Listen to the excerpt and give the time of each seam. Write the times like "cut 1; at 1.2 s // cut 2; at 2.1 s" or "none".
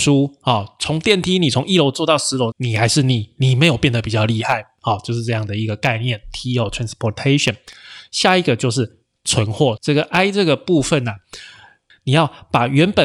cut 1; at 2.5 s // cut 2; at 9.8 s // cut 3; at 11.9 s